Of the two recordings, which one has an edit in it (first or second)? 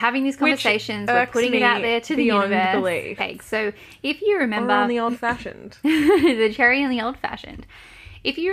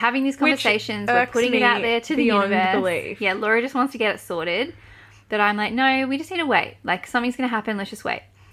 first